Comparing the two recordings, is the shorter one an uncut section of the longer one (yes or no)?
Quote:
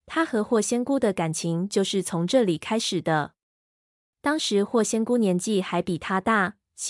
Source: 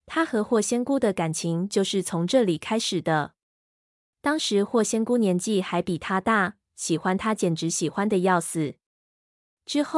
yes